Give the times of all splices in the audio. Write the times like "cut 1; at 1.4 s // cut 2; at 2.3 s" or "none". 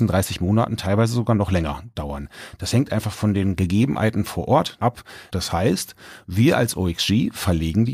cut 1; at 5.3 s